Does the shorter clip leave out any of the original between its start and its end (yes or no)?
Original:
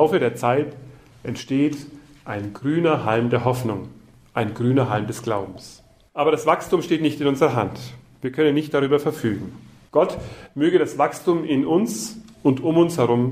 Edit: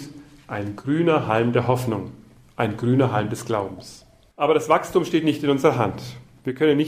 no